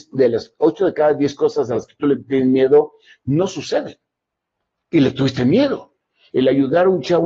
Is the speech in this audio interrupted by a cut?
yes; 1 cut; at 6.3 s

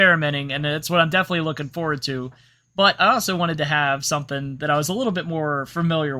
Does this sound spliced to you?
no; 0 cuts

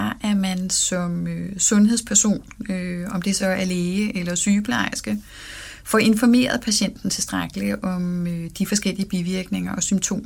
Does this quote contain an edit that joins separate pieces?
no; 0 cuts

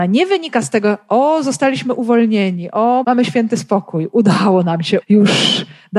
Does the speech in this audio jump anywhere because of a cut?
yes; 2 cuts; at 3.0 s, 5.0 s

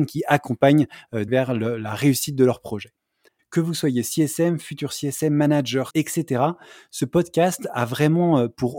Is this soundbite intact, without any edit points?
no; 3 cuts; at 1.3 s, 3.4 s, 5.9 s

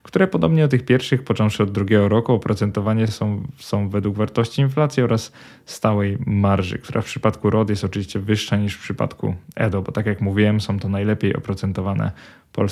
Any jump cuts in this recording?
no; 0 cuts

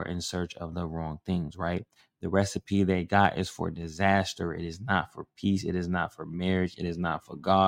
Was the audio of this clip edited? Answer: no; 0 cuts

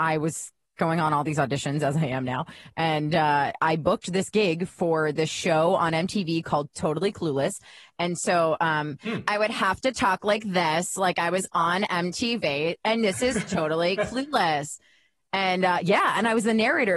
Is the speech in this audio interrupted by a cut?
no; 0 cuts

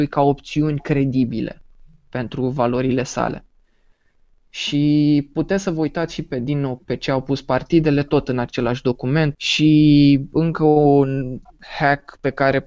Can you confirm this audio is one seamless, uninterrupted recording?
no; 2 cuts; at 6.8 s, 9.3 s

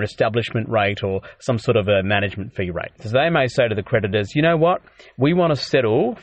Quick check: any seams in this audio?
yes; 1 cut; at 3.0 s

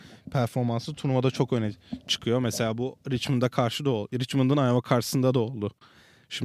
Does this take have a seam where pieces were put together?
no; 0 cuts

